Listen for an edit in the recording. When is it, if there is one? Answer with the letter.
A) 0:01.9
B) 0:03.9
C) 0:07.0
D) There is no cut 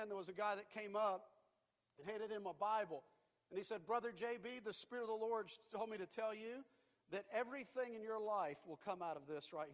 D